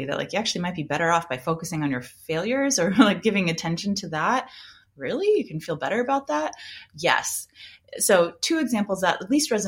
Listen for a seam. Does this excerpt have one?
no; 0 cuts

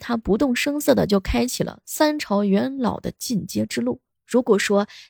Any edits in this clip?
yes; 1 cut; at 4.1 s

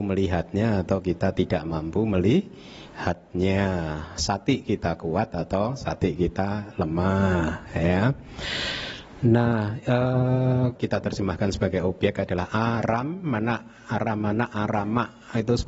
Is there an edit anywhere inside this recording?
yes; 1 cut; at 10.8 s

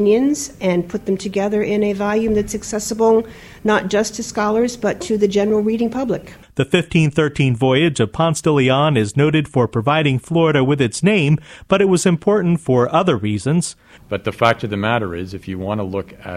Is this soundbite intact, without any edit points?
no; 1 cut; at 14.0 s

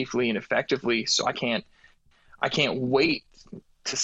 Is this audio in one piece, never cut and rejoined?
yes; 0 cuts

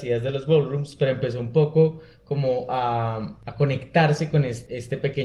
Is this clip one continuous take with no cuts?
yes; 0 cuts

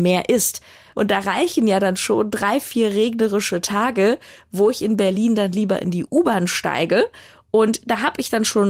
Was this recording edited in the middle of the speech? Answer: yes; 1 cut; at 0.9 s

